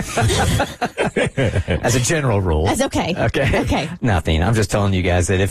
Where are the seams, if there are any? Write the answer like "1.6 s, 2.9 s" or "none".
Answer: none